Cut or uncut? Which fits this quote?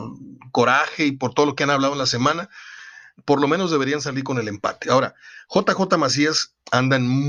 uncut